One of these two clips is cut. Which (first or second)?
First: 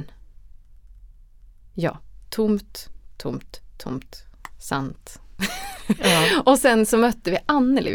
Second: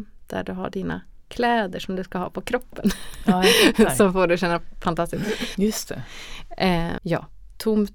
second